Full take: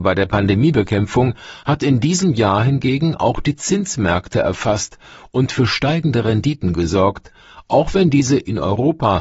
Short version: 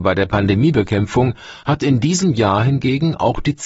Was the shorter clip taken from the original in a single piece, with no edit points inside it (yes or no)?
yes